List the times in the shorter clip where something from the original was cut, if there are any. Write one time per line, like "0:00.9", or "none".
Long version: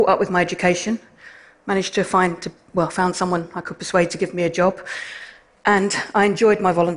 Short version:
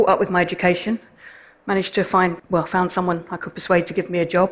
0:02.4